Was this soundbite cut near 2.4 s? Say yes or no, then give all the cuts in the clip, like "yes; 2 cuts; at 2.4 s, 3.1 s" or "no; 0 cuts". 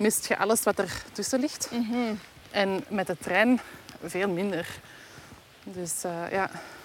no; 0 cuts